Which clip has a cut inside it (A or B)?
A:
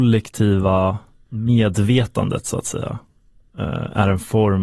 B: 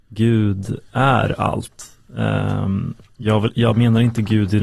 A